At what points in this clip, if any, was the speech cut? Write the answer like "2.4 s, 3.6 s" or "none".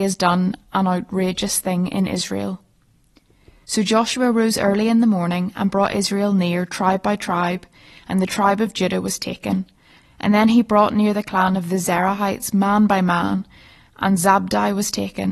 10.0 s